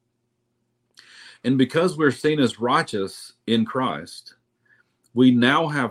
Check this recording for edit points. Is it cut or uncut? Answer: uncut